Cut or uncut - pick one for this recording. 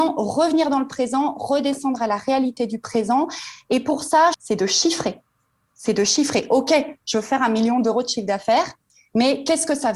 cut